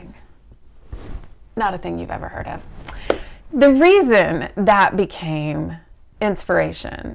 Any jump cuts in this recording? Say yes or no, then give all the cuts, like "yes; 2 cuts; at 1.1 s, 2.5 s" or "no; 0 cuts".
no; 0 cuts